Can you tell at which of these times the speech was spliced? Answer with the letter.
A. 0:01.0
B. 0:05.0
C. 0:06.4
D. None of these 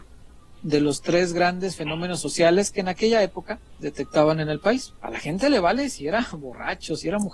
B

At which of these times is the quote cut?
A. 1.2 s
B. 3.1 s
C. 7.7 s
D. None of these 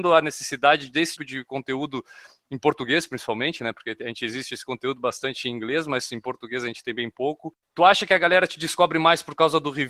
A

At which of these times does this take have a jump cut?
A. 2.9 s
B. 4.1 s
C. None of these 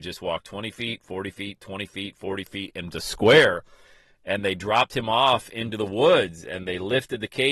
A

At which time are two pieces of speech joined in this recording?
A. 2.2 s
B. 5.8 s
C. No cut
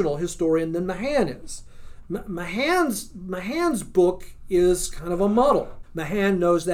B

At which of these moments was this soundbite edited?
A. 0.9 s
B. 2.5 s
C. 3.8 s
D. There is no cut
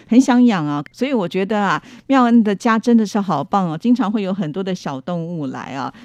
A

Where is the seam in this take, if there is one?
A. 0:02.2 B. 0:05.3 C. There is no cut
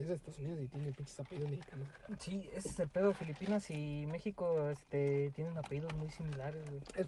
C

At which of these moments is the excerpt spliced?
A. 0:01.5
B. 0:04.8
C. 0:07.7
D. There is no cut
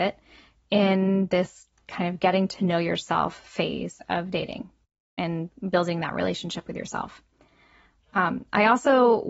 D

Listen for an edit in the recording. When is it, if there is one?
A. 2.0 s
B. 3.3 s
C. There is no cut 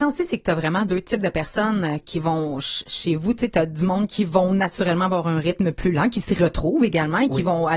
A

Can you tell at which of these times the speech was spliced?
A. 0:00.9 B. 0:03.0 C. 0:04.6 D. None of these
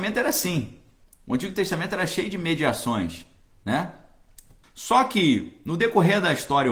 C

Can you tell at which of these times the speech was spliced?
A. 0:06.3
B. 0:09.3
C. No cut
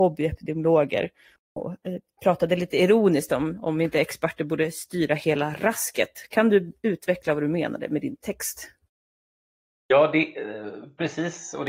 C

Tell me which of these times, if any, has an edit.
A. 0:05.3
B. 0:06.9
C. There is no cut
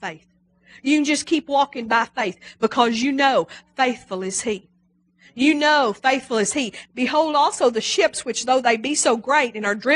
B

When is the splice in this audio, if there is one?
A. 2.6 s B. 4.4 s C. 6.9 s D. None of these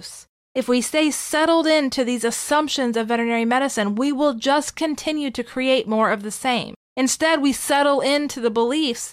C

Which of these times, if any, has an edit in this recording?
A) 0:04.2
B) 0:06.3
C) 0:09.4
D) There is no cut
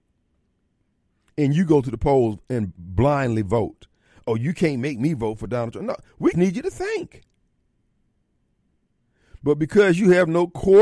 B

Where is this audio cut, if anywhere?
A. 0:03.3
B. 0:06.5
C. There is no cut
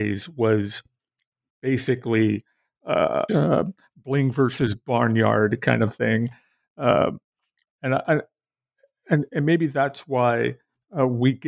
A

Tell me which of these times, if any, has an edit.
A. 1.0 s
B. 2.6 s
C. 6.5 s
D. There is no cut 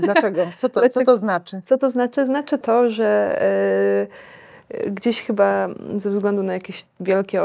B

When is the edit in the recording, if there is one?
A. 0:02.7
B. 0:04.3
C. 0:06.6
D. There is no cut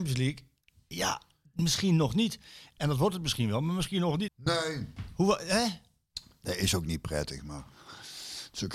B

